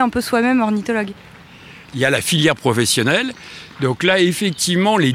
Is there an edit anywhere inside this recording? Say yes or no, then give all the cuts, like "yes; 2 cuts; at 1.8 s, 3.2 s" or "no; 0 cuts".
yes; 1 cut; at 1.9 s